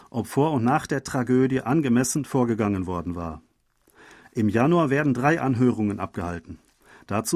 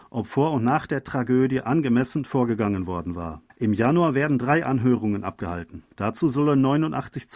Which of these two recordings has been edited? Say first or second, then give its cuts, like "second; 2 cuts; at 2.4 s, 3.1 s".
second; 2 cuts; at 3.5 s, 5.9 s